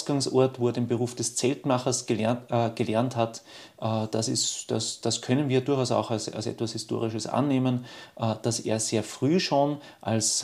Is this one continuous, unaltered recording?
yes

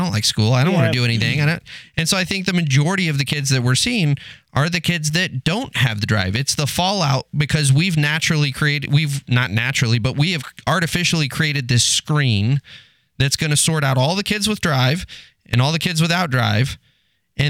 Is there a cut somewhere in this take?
no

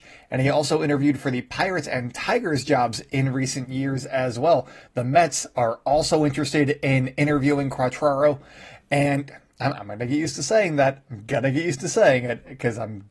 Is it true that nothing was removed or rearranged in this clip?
yes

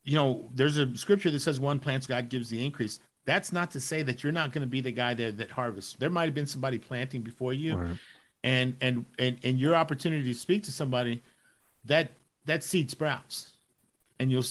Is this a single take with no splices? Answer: no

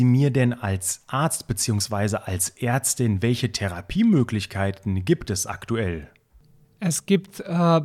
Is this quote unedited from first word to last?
yes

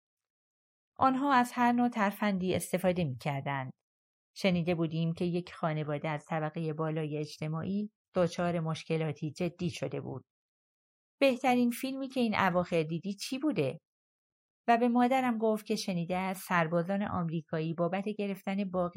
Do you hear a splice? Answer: yes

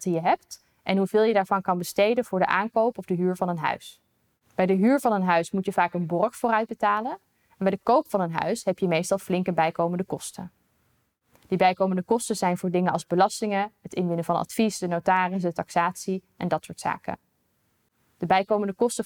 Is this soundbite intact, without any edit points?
yes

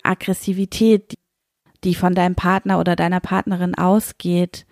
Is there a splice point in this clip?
no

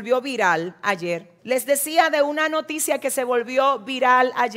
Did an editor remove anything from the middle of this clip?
yes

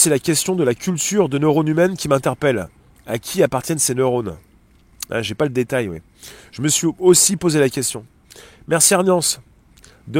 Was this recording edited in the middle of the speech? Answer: no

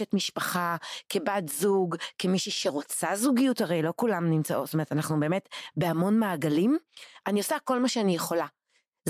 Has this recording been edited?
no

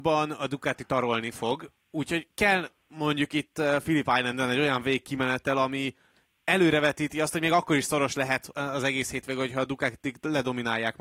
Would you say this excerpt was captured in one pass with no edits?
no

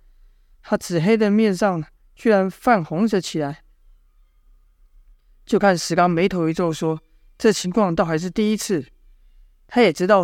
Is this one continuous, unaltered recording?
yes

